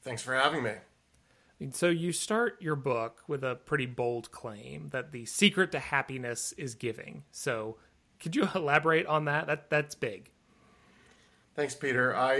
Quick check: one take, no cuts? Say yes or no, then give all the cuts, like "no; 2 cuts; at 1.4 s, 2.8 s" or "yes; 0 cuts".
yes; 0 cuts